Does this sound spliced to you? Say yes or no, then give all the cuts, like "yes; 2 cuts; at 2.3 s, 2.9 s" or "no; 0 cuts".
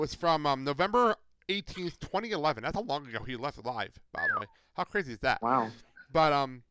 no; 0 cuts